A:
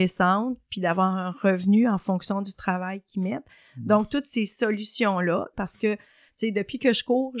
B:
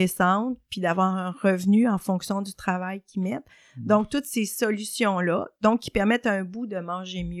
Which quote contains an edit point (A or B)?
A